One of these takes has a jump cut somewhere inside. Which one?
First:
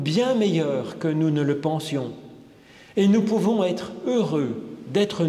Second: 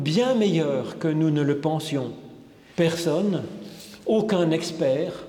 second; 1 cut; at 2.7 s

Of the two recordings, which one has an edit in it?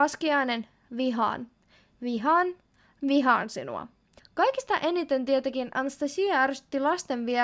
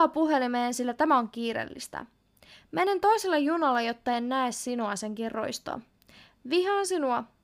first; 1 cut; at 4.2 s

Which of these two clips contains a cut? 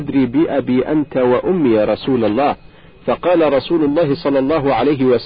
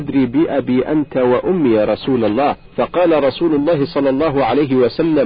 second; 1 cut; at 2.7 s

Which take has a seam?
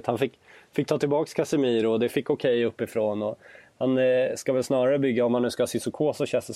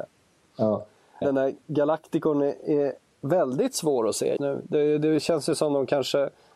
second; 2 cuts; at 1.2 s, 4.4 s

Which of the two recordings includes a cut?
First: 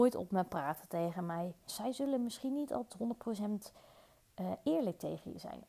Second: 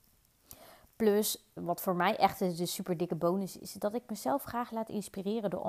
first; 1 cut; at 1.7 s

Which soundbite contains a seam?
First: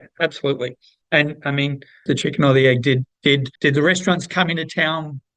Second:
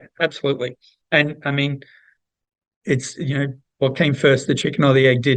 first; 2 cuts; at 2.1 s, 3.6 s

